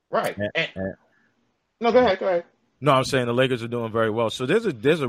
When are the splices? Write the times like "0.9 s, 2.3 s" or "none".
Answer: none